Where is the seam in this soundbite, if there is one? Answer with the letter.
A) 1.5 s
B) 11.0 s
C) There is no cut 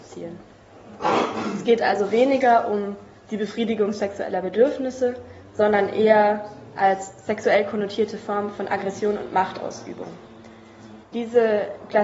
B